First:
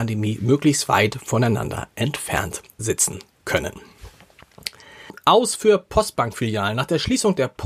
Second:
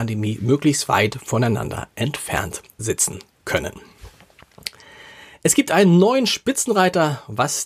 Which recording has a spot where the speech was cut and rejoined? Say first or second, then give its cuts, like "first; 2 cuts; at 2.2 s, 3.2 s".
first; 1 cut; at 5.1 s